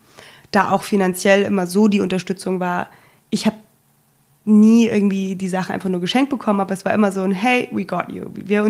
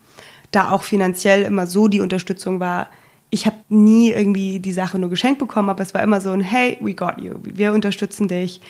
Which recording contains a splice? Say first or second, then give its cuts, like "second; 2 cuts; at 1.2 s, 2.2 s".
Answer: second; 2 cuts; at 3.6 s, 4.9 s